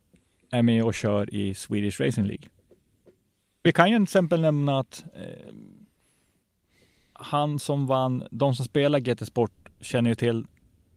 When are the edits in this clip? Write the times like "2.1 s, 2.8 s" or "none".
3.6 s